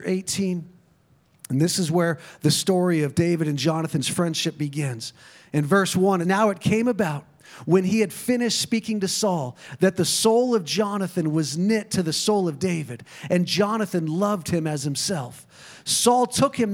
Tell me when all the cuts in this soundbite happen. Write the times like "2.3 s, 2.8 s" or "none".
6.2 s

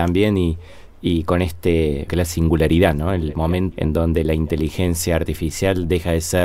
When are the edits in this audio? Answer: 2.1 s, 3.7 s

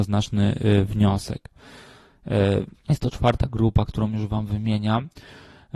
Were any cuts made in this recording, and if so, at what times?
2.8 s

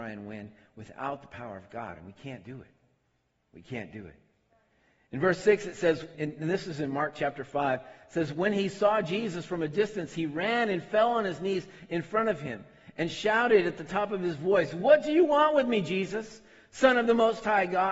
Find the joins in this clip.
6.1 s

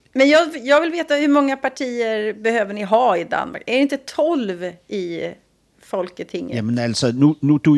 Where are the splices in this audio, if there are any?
none

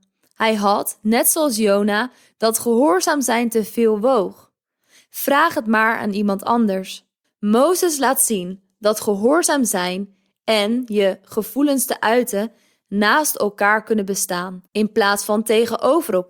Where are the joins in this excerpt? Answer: 2.3 s, 7.2 s, 14.7 s

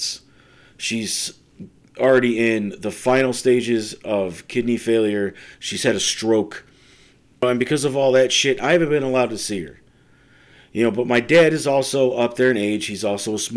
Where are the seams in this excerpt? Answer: 5.5 s

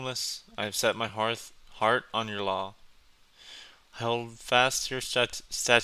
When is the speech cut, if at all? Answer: none

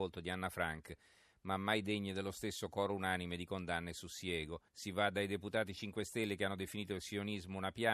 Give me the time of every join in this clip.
4.7 s

